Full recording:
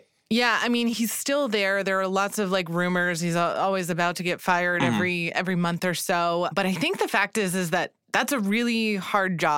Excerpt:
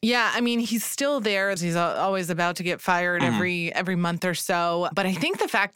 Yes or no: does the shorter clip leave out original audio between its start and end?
yes